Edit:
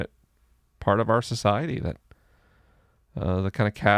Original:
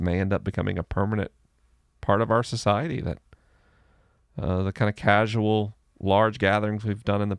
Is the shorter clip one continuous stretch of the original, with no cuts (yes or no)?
yes